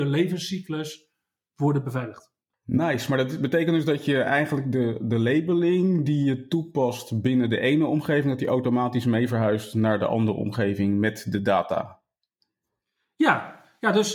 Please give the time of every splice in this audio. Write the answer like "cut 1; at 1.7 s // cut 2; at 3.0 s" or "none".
cut 1; at 2.5 s